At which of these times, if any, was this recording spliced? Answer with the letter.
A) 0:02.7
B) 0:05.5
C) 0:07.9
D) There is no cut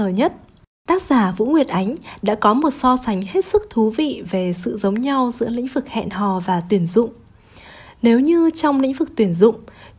D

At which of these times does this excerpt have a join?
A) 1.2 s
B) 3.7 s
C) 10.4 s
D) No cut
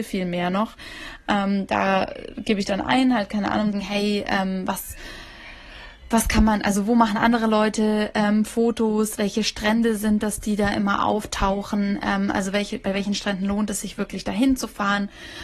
B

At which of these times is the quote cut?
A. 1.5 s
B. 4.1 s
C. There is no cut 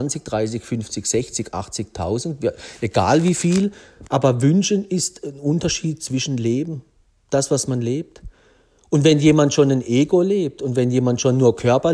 B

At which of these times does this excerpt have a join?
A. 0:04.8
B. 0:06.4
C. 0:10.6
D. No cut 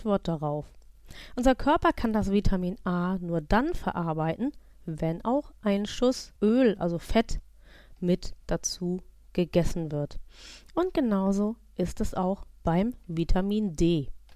B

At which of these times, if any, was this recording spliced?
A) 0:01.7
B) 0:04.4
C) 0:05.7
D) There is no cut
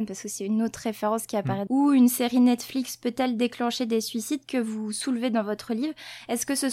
A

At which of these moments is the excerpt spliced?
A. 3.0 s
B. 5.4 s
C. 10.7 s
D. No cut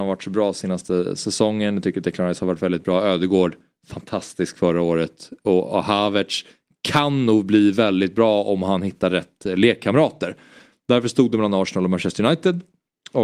C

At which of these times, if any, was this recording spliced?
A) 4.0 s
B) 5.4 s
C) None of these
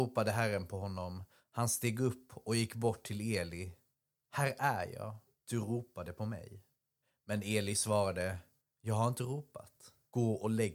B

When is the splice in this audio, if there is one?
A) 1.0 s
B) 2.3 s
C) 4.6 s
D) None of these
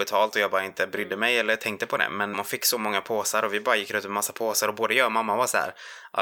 B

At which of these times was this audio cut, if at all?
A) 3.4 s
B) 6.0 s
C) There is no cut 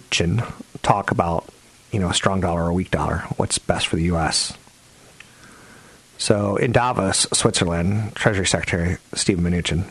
C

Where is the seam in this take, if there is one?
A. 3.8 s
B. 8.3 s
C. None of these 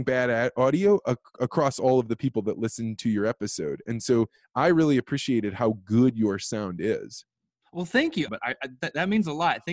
B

